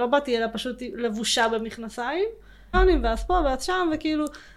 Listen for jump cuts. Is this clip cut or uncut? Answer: cut